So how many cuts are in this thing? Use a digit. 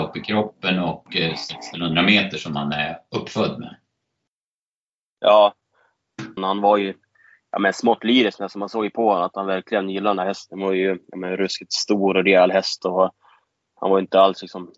1